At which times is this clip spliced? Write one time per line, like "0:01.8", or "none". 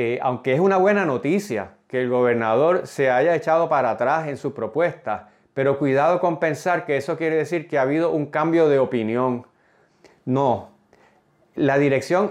none